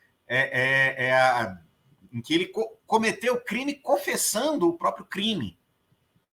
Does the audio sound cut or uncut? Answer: uncut